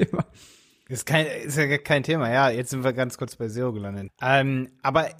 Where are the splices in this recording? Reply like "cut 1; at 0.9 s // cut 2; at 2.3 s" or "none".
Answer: cut 1; at 4.1 s